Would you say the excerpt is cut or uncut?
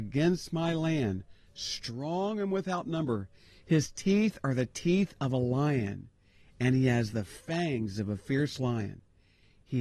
uncut